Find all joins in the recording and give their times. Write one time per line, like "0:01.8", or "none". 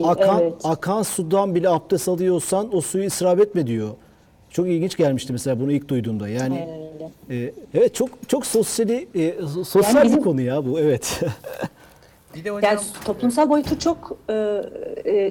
0:07.6